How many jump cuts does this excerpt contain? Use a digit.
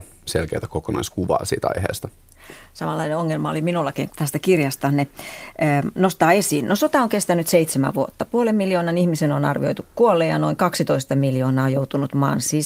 1